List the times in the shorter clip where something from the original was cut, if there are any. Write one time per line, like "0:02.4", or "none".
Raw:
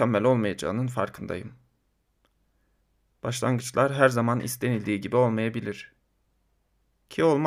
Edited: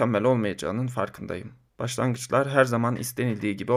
0:01.7